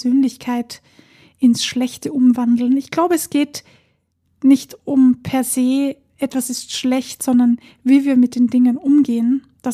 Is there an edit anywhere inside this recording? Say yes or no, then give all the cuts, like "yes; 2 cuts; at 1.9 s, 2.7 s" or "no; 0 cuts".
no; 0 cuts